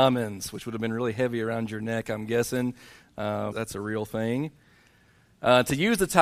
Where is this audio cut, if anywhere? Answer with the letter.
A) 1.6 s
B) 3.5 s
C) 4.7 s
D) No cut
B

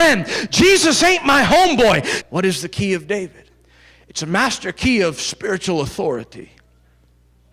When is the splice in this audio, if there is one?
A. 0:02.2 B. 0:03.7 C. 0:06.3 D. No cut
A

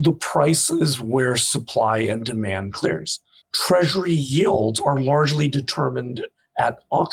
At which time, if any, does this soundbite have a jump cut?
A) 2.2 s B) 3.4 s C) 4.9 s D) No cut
B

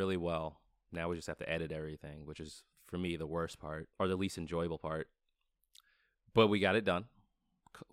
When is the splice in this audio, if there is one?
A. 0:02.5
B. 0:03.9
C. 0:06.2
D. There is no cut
B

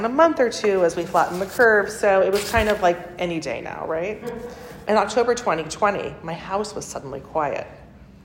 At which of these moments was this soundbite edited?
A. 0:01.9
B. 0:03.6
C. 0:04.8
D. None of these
C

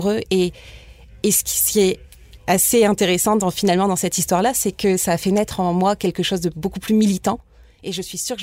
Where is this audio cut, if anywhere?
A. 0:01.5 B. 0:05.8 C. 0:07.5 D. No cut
D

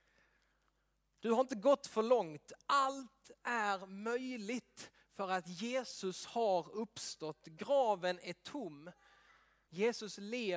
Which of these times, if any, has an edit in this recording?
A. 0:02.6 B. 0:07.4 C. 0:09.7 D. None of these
C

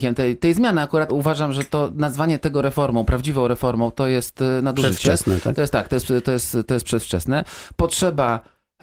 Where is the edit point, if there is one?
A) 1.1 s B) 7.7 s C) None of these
A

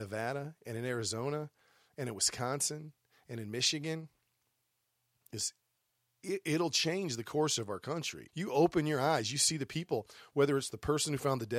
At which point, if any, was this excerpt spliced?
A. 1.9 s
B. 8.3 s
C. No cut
B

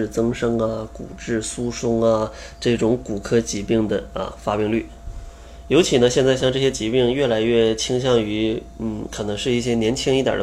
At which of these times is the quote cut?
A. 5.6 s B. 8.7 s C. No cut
C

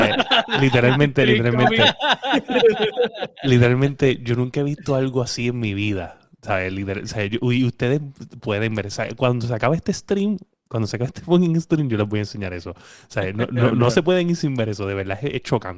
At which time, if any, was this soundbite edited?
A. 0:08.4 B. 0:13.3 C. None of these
A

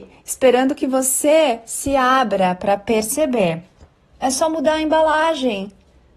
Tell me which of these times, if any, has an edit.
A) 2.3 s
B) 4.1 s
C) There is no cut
B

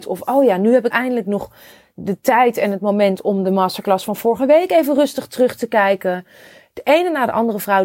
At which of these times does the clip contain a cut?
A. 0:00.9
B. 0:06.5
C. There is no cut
A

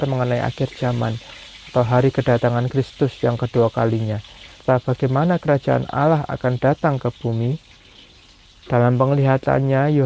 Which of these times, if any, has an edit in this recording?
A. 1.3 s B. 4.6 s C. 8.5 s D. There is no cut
B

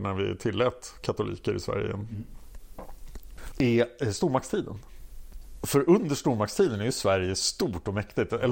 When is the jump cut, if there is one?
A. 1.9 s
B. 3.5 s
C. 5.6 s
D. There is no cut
B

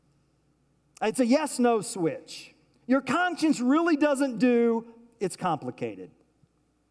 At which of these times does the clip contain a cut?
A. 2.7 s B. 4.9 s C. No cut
A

